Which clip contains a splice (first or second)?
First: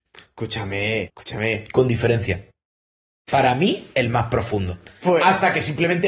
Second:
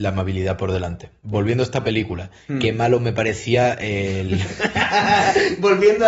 first